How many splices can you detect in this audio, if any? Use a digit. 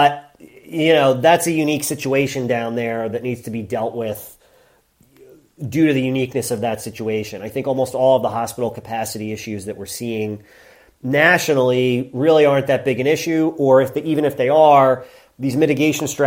0